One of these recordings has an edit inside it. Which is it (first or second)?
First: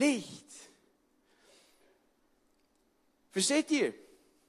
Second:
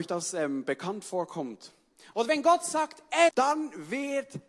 second